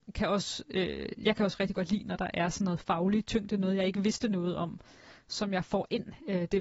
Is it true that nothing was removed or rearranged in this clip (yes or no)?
yes